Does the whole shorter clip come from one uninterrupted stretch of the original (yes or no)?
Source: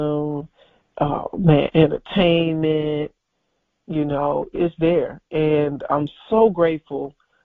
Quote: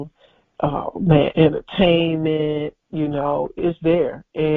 no